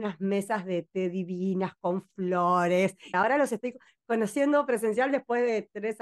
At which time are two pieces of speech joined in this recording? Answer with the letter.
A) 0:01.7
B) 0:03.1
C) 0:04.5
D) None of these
B